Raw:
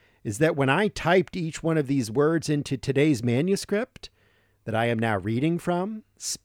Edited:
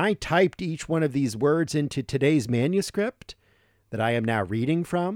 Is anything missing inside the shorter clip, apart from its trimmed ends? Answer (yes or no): no